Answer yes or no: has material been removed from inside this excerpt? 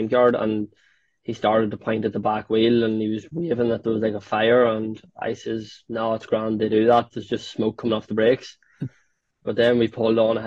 no